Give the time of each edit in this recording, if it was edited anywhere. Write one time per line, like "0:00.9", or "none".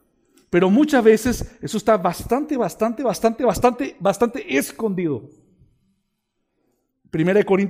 none